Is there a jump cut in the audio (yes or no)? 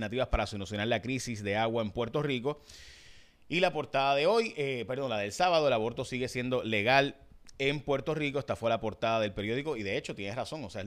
no